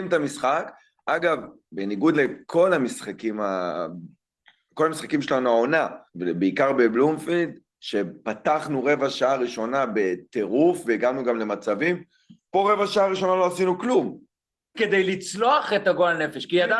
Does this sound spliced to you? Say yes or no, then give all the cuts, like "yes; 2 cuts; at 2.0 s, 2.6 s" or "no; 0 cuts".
yes; 2 cuts; at 6.1 s, 14.7 s